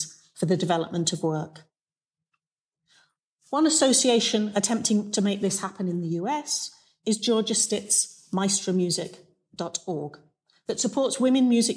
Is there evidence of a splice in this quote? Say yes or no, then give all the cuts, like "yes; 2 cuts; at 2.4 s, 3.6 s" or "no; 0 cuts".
no; 0 cuts